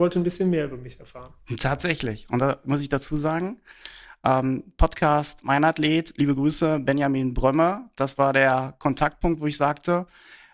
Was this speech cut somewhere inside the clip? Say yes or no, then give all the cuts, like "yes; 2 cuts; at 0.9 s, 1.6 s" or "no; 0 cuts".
no; 0 cuts